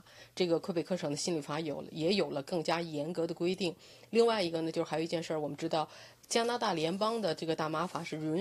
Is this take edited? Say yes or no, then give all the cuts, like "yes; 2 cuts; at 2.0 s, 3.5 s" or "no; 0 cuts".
no; 0 cuts